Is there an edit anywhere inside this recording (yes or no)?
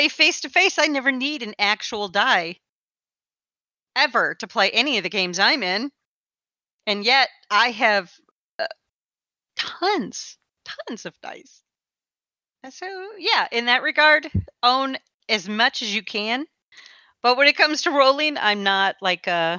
no